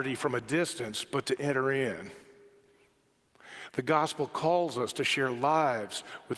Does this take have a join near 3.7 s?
no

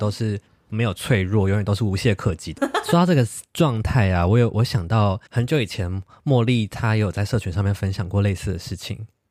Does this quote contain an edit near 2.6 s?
yes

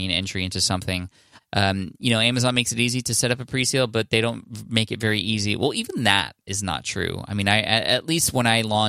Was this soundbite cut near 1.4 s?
yes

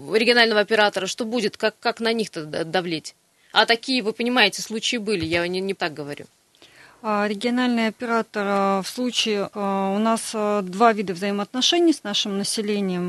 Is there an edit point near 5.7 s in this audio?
yes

